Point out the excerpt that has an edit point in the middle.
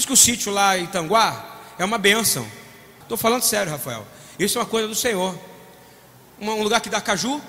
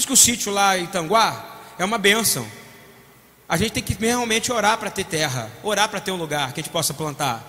first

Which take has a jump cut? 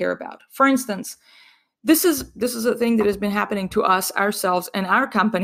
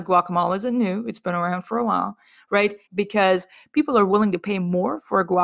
second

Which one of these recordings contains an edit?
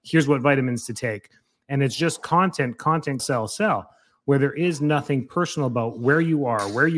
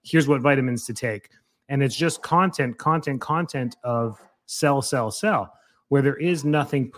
first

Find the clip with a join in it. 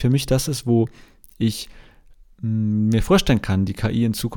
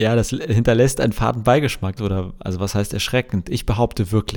second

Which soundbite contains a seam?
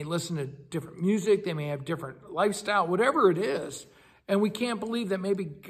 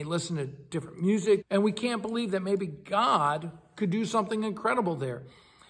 second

